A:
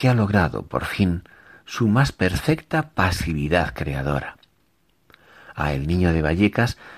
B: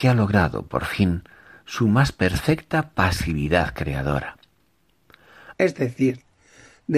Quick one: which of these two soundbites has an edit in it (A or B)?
B